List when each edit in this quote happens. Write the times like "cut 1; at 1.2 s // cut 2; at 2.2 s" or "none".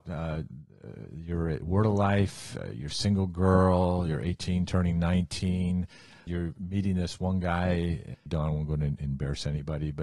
cut 1; at 8.3 s